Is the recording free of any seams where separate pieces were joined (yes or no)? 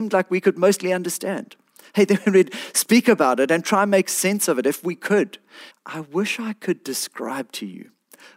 no